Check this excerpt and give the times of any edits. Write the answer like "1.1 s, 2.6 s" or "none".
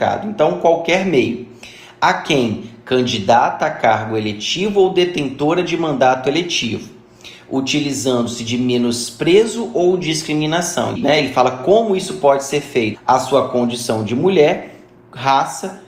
11.0 s, 12.9 s